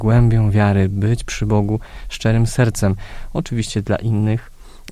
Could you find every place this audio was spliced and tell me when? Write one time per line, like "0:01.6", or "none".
none